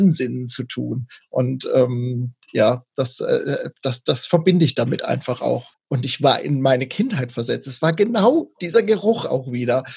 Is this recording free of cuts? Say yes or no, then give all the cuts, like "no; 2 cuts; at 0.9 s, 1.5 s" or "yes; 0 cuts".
no; 1 cut; at 5.7 s